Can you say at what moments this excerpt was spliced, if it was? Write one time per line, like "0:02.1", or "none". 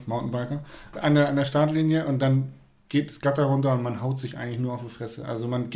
0:00.9